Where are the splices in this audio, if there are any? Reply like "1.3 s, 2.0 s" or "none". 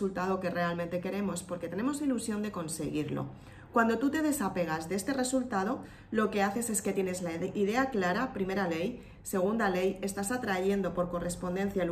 none